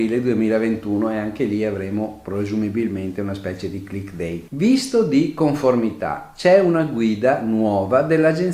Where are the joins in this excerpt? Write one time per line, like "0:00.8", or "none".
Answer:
0:04.5